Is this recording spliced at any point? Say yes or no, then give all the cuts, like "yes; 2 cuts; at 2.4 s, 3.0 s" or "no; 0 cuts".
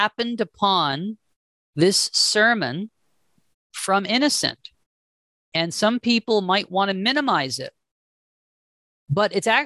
no; 0 cuts